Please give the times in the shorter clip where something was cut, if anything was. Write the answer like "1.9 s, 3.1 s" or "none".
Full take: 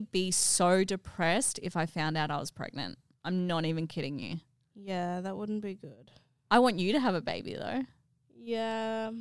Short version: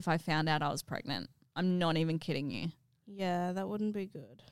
none

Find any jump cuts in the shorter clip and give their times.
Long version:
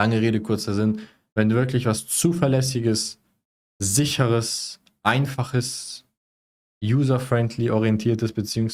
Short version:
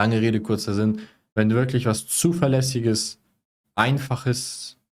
3.6 s

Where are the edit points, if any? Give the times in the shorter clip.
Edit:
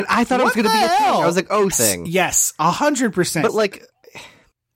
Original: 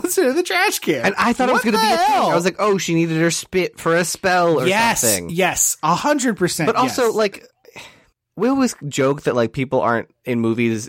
1.7 s, 3.5 s

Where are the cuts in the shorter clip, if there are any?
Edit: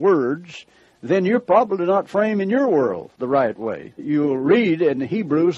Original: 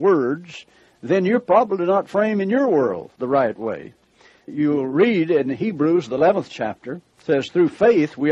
3.9 s

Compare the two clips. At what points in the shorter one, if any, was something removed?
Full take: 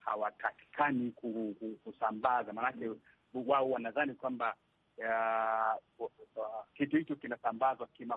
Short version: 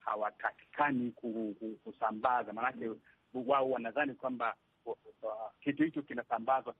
4.8 s

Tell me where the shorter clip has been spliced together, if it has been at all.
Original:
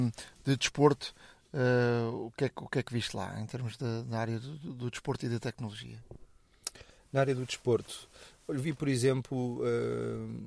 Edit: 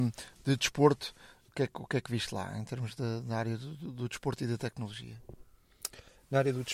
1.5 s

